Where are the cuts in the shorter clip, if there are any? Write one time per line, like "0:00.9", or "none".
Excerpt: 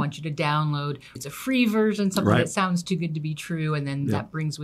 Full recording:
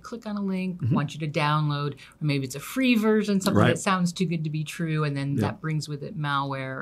0:01.2